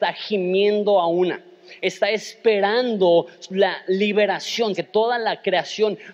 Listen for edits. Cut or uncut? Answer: cut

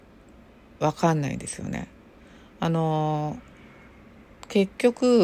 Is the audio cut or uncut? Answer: uncut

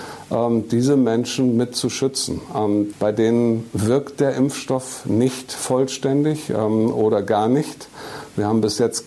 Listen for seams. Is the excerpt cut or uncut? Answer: cut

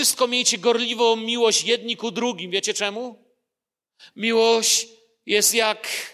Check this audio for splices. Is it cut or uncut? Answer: cut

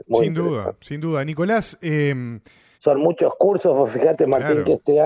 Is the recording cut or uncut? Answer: cut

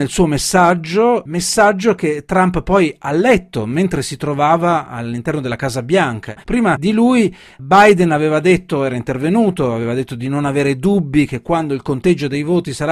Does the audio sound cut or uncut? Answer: cut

